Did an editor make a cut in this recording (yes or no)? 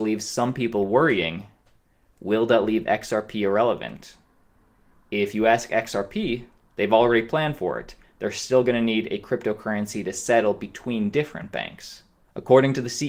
no